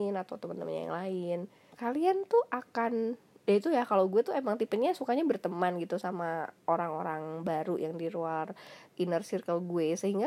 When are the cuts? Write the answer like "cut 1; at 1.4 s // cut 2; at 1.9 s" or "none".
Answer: cut 1; at 1.7 s